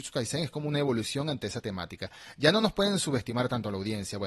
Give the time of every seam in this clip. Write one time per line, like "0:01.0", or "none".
none